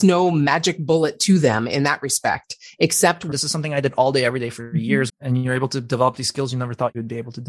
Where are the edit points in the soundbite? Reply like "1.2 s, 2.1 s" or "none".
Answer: 3.3 s, 5.1 s